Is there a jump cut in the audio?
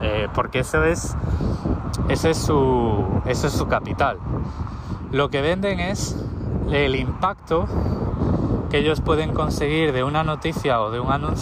no; 0 cuts

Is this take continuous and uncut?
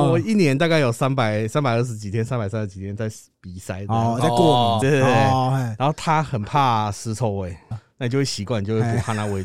no; 2 cuts; at 4.8 s, 7.7 s

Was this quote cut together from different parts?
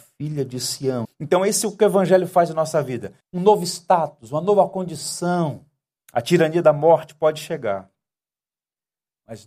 yes; 3 cuts; at 1.1 s, 3.2 s, 6.0 s

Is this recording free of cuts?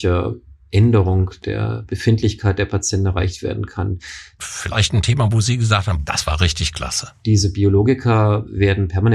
no; 3 cuts; at 4.4 s, 6.0 s, 7.2 s

